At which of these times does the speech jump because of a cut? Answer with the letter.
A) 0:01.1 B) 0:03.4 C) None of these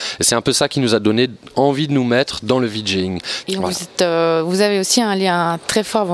B